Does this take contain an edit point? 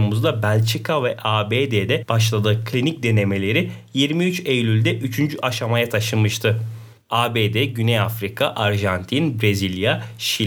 no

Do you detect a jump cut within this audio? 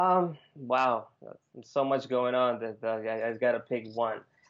no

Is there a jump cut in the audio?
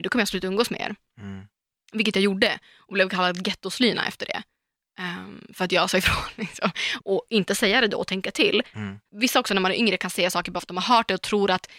yes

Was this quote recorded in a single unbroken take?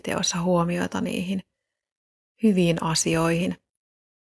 yes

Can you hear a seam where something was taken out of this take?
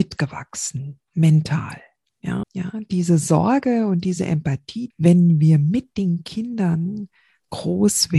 yes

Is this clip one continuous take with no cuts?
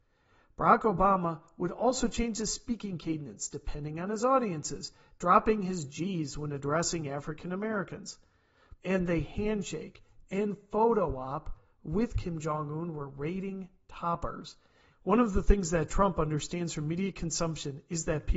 no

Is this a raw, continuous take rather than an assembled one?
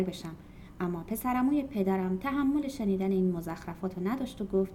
yes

